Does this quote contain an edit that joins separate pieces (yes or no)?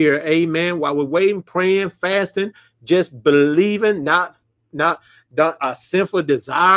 yes